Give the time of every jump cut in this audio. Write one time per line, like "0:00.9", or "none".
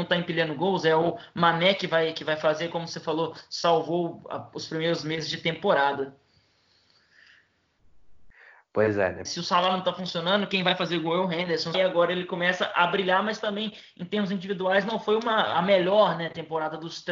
0:09.3
0:11.7